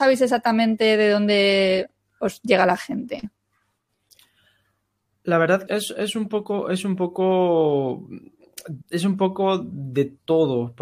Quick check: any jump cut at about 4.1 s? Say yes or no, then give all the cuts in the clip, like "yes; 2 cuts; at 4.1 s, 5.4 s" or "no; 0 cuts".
no; 2 cuts; at 5.7 s, 8.8 s